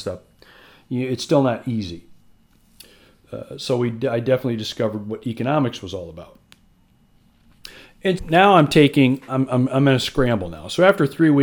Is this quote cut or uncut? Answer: cut